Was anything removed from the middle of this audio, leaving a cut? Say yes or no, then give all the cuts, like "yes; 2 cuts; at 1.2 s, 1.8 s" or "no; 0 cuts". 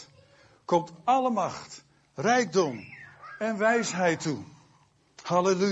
no; 0 cuts